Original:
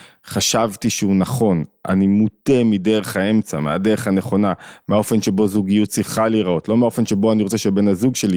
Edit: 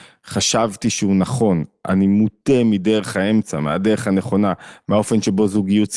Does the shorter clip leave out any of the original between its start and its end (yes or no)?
no